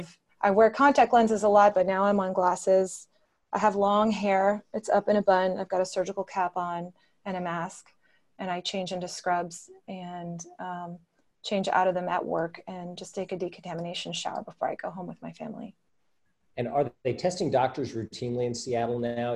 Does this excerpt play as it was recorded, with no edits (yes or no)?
yes